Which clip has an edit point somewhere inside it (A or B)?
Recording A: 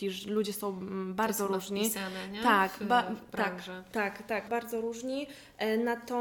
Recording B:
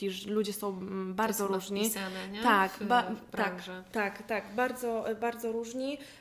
A